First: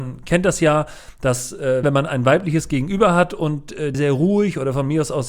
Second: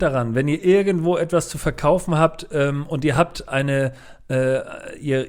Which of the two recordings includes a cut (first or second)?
first